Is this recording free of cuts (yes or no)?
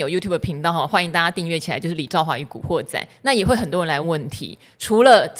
no